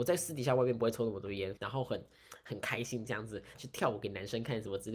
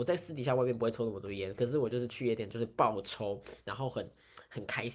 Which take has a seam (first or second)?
first